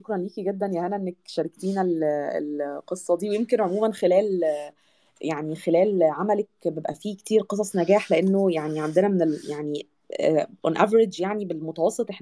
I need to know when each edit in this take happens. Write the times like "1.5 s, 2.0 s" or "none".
none